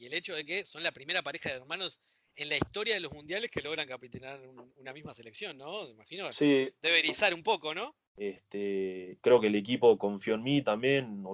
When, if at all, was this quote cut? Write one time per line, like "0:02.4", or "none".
0:08.1
0:09.2